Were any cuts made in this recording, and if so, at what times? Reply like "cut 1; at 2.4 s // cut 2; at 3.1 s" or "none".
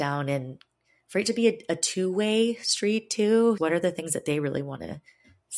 cut 1; at 3.6 s